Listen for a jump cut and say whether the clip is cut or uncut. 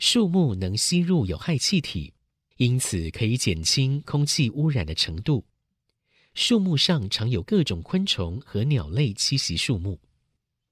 cut